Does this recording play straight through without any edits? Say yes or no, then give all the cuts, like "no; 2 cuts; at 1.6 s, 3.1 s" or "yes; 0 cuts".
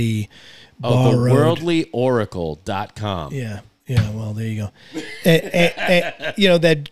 yes; 0 cuts